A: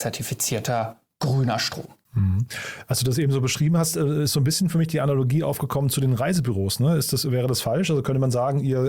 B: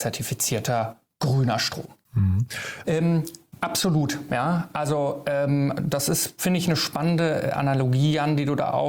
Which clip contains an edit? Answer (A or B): B